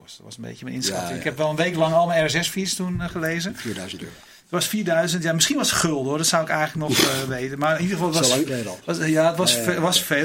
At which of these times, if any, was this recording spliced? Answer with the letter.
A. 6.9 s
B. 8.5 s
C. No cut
B